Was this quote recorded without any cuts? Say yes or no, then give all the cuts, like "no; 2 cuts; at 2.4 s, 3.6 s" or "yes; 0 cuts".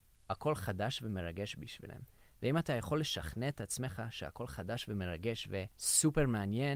no; 1 cut; at 5.7 s